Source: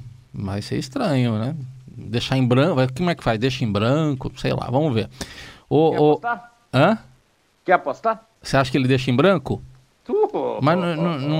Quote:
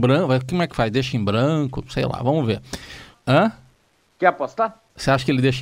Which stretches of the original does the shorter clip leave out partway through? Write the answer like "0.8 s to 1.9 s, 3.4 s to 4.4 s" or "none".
5.6 s to 6.6 s